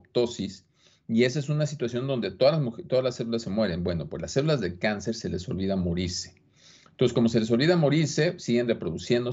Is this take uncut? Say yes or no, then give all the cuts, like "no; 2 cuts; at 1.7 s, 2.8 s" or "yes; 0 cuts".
yes; 0 cuts